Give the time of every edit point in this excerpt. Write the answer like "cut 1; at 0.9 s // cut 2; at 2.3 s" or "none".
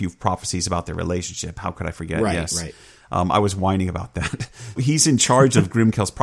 cut 1; at 4.8 s